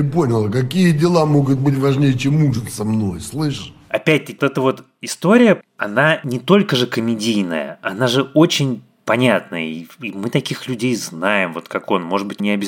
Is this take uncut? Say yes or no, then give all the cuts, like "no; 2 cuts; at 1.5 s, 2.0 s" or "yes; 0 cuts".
no; 1 cut; at 4.4 s